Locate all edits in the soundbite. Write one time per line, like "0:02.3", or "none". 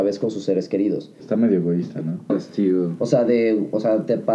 0:01.2
0:02.3